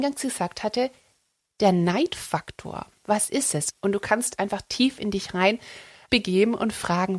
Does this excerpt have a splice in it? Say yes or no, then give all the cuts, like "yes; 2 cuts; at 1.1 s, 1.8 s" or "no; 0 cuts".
yes; 1 cut; at 3.0 s